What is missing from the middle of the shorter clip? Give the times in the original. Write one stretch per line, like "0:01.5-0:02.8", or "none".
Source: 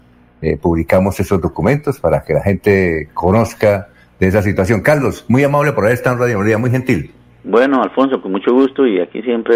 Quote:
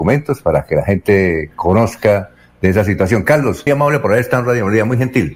0:05.2-0:05.4